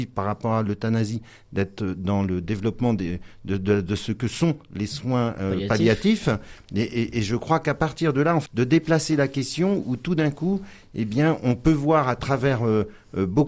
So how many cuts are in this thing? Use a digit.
1